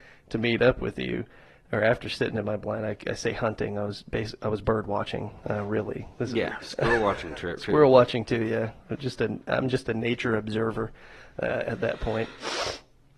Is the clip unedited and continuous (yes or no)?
no